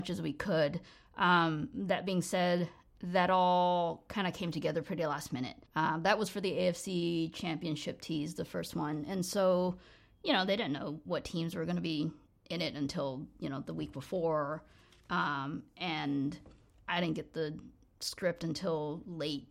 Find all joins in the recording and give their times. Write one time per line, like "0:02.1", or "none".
0:05.7